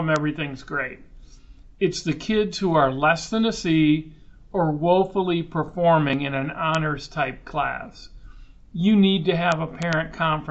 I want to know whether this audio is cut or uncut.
uncut